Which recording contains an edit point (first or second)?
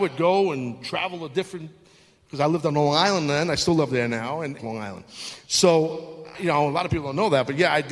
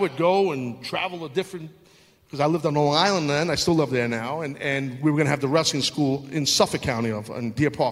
first